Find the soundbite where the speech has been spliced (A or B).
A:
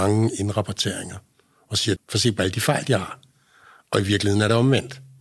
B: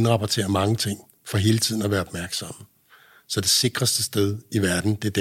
A